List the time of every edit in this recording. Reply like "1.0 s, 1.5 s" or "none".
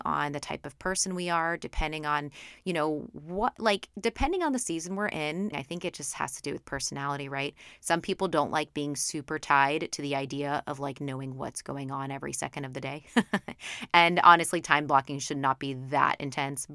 5.5 s

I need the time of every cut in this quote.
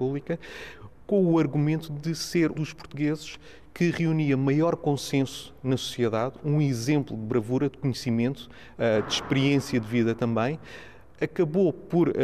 2.5 s

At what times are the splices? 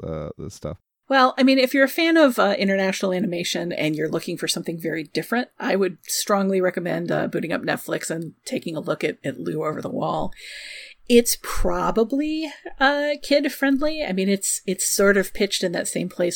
none

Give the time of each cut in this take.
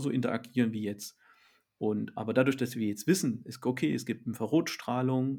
none

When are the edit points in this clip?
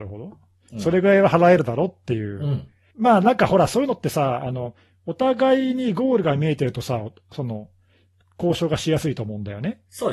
2.9 s

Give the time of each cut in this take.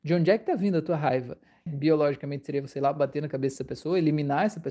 1.7 s

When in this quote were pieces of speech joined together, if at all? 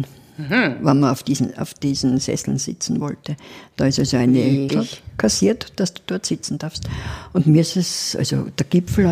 4.7 s

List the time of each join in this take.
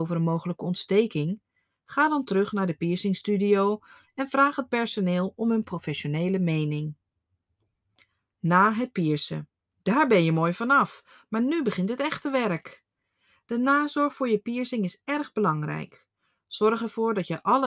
9.7 s

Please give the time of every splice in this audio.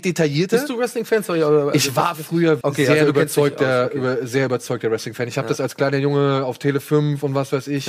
2.6 s

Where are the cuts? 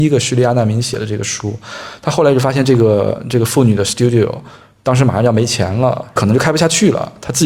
none

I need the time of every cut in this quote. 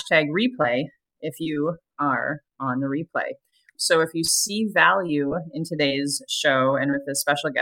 3.7 s

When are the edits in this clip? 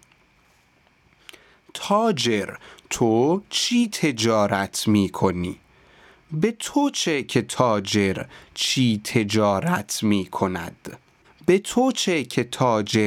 11.2 s

